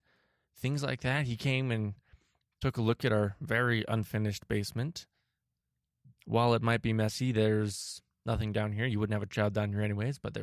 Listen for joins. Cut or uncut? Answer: uncut